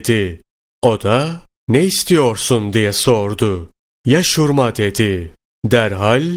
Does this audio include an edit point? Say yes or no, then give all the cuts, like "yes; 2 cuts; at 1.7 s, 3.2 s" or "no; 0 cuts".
no; 0 cuts